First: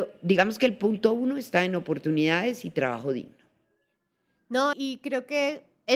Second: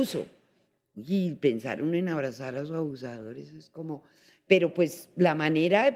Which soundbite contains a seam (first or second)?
first